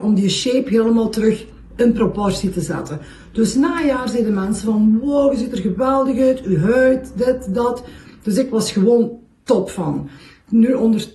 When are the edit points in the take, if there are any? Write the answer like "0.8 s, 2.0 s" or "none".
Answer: none

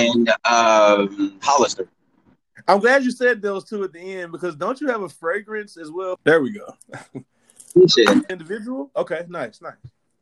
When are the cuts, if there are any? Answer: 6.2 s, 8.3 s

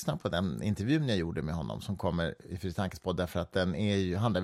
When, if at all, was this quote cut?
none

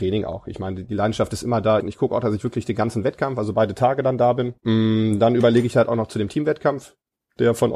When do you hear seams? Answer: 1.8 s, 4.6 s

